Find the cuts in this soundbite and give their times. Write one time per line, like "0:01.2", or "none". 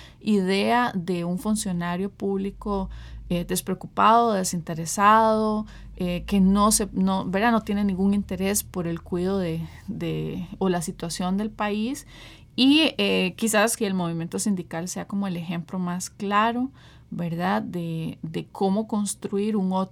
0:13.8